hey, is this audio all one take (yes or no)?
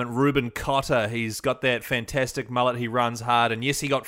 yes